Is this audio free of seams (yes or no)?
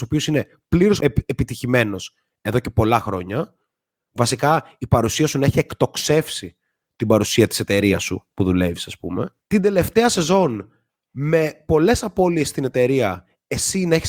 yes